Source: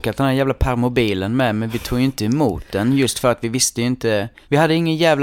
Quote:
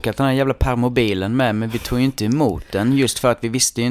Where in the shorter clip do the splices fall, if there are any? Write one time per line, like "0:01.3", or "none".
none